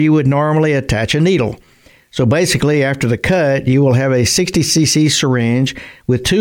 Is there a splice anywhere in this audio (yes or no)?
no